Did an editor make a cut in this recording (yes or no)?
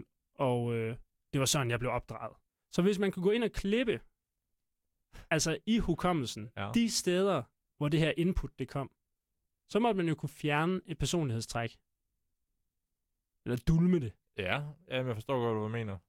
no